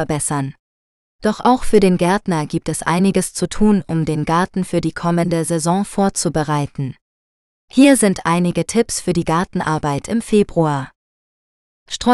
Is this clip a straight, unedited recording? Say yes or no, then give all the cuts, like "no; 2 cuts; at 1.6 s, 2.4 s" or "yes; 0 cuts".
no; 1 cut; at 1.1 s